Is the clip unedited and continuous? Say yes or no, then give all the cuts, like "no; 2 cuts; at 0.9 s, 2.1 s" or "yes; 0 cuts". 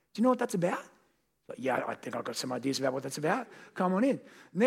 yes; 0 cuts